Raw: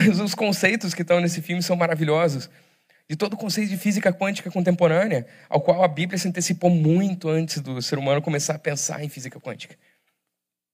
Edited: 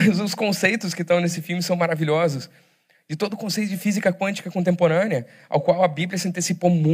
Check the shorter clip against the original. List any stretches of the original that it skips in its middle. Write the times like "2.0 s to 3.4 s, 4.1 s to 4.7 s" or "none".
none